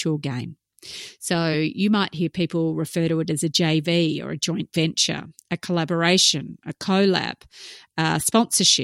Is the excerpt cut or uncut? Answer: uncut